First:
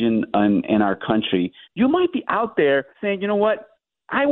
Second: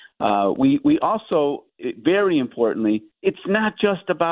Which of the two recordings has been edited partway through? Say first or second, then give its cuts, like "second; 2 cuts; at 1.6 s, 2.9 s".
first; 2 cuts; at 1.6 s, 2.9 s